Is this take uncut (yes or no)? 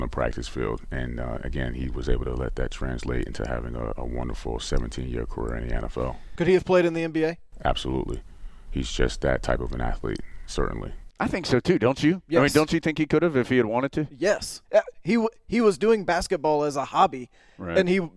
no